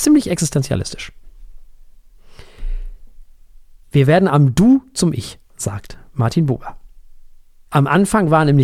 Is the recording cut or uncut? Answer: uncut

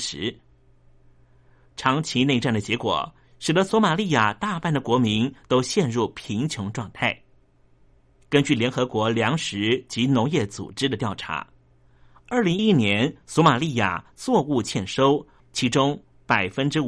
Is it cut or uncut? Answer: cut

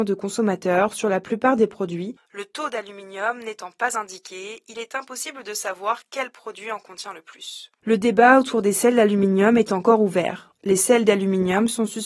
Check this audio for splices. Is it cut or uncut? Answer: cut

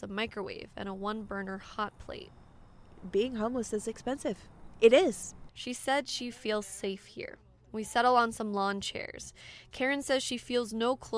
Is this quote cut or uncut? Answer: cut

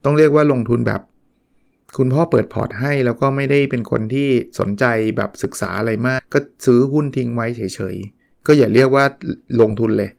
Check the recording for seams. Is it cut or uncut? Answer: cut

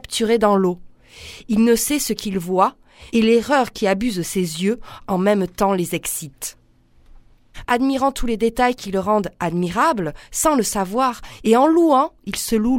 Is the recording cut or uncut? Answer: cut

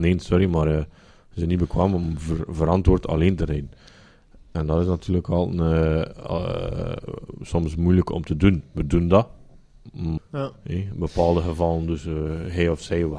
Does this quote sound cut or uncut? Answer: cut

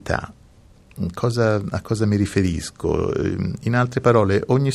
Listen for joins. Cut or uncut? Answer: uncut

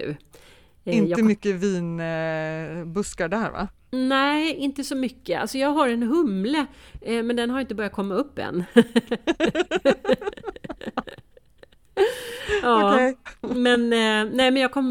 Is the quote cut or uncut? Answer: uncut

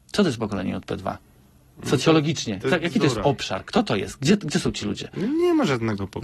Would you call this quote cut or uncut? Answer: uncut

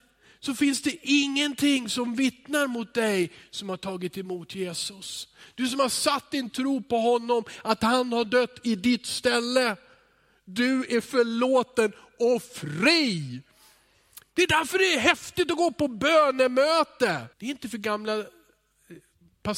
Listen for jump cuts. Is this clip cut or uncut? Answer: cut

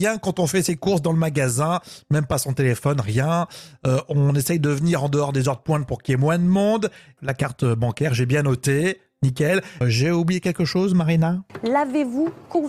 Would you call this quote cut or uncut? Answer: cut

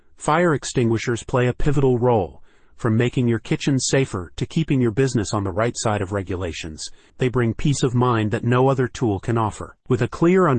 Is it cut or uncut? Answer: cut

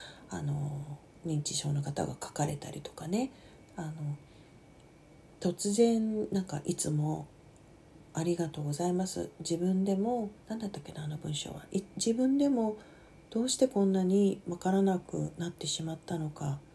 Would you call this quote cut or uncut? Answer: cut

